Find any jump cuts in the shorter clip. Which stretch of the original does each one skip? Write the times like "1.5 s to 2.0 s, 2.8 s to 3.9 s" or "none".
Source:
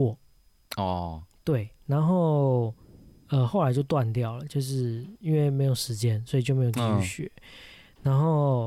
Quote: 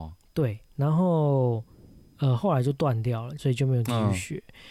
4.5 s to 6.3 s